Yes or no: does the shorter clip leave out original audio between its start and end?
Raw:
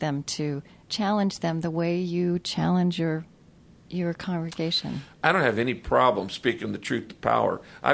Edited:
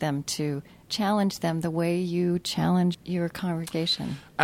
yes